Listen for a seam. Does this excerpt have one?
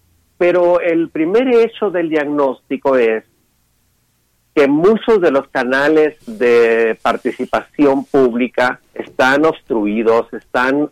yes; 2 cuts; at 6.2 s, 8.9 s

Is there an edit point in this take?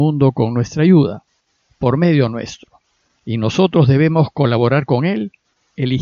no; 0 cuts

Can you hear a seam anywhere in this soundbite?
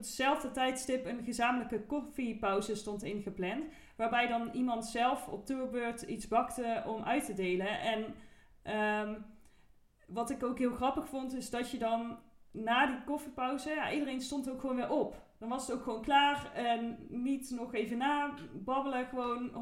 no; 0 cuts

